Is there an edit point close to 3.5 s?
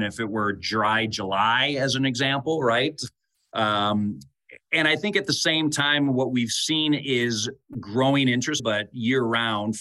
no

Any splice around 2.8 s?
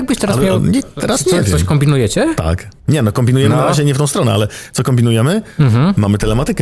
yes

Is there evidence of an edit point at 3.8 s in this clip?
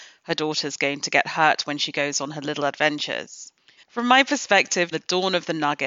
yes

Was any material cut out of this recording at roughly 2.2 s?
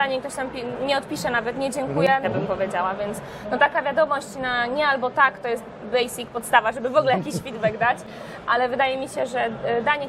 yes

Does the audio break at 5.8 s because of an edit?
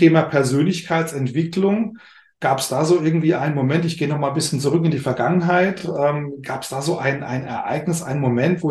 no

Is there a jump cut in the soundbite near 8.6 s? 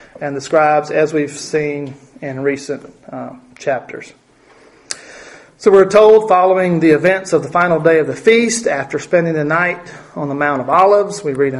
no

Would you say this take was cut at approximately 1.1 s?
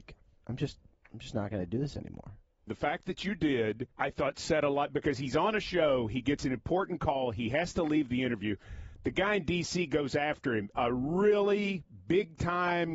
no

